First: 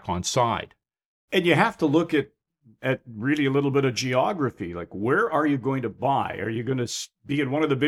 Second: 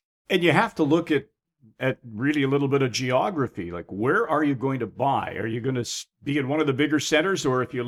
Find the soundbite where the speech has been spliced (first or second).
first